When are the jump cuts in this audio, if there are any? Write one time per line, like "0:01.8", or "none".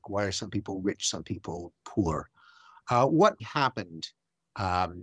0:03.4